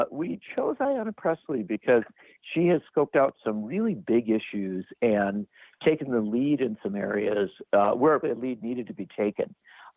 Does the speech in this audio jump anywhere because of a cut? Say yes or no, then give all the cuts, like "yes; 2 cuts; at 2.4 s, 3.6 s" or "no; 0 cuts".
yes; 1 cut; at 8.2 s